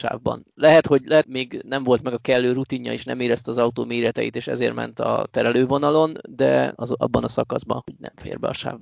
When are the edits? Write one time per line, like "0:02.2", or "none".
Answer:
0:01.2
0:06.8
0:07.8

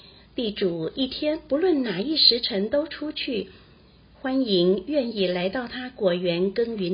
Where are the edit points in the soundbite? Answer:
none

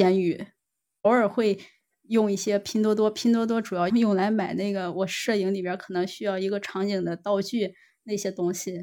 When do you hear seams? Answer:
0:03.9

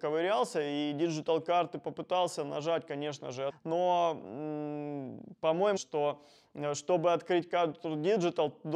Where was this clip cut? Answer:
0:03.5
0:05.8

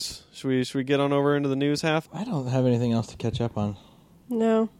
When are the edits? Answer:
0:02.0

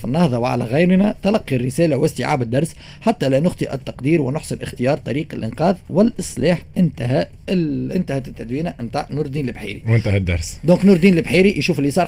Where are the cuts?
none

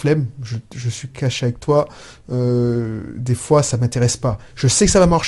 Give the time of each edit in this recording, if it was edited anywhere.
none

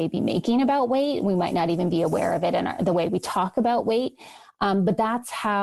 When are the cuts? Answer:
none

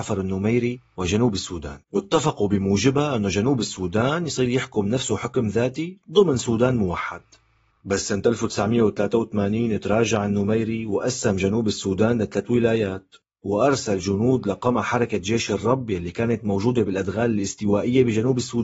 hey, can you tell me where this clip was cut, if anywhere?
0:01.8

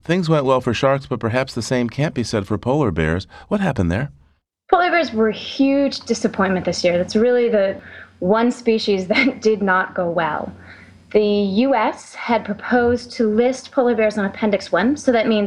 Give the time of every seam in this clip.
none

